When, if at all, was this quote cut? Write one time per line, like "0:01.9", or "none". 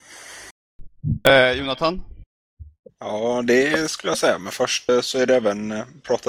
0:02.9